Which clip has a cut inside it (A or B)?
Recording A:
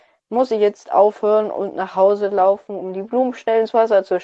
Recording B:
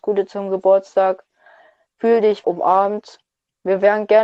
B